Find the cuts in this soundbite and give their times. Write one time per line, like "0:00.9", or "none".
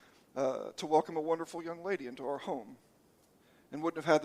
none